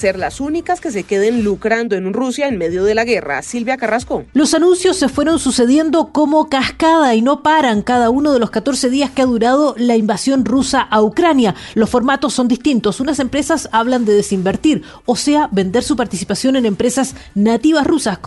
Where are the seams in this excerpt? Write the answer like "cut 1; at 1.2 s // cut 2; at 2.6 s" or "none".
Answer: none